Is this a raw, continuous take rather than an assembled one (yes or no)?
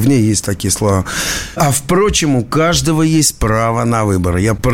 yes